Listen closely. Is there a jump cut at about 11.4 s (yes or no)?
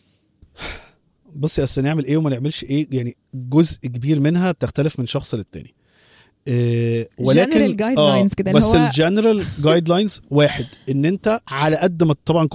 yes